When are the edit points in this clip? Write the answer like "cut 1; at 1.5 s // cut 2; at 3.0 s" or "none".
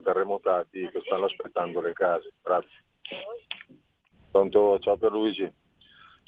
cut 1; at 2.4 s // cut 2; at 4.1 s